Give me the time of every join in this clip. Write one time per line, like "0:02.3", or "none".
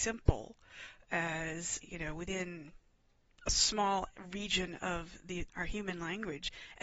0:01.8
0:05.5